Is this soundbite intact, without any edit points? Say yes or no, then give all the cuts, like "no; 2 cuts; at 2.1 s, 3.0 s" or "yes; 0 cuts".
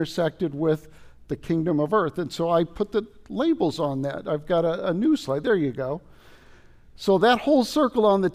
yes; 0 cuts